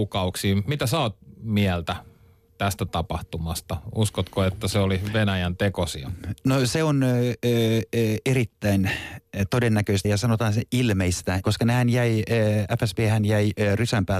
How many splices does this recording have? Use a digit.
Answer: 2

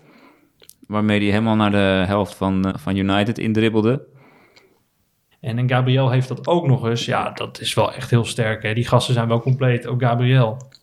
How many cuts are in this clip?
2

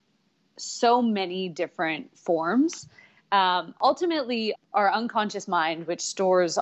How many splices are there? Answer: 2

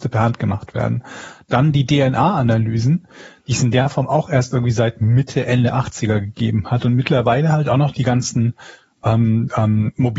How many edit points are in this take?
0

